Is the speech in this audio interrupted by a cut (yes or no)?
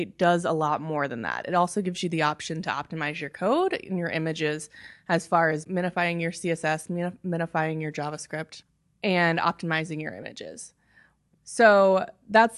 yes